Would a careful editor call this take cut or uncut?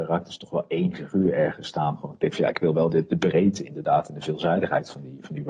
cut